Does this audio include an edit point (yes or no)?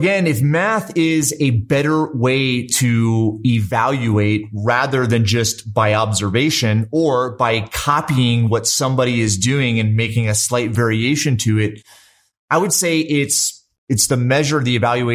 no